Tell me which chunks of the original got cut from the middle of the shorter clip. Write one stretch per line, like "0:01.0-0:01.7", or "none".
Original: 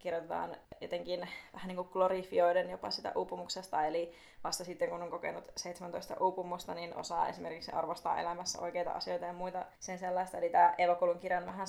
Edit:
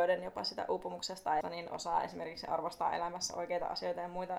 0:03.9-0:06.7